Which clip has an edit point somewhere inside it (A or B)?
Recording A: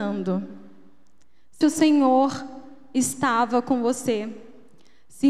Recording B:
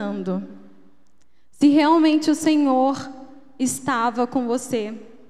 A